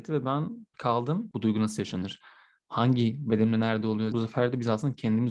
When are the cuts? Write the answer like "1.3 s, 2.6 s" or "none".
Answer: 1.3 s, 4.1 s